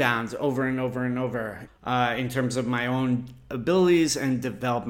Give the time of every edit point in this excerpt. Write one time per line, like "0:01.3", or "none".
0:01.7